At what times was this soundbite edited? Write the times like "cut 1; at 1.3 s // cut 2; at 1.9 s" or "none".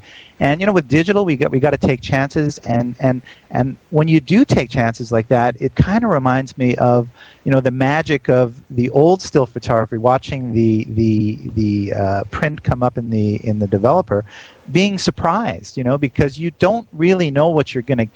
none